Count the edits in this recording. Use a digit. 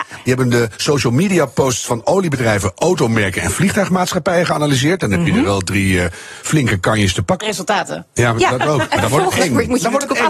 1